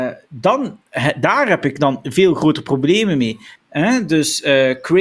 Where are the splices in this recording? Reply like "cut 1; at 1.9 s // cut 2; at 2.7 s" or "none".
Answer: cut 1; at 3.5 s